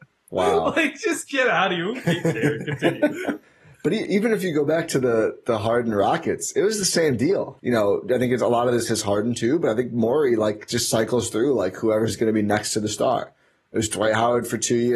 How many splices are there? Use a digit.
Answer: 2